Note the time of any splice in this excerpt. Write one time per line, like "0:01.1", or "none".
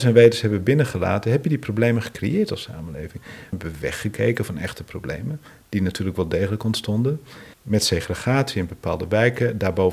0:03.5
0:07.5